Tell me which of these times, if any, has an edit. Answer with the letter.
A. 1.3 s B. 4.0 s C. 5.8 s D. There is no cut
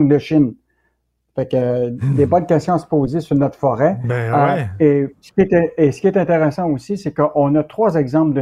D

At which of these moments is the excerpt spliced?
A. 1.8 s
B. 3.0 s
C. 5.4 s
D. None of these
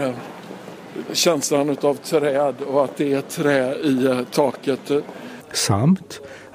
C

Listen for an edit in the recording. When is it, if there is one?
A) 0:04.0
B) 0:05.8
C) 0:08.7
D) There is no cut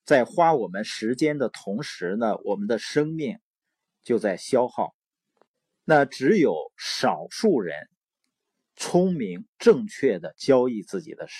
B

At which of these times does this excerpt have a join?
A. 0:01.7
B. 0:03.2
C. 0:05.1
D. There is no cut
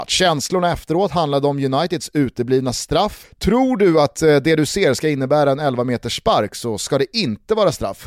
B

